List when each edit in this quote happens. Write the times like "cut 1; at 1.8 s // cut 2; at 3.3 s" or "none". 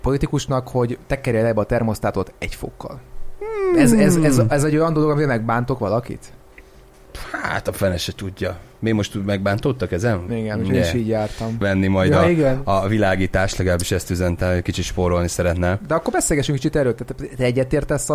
cut 1; at 10.3 s // cut 2; at 11.6 s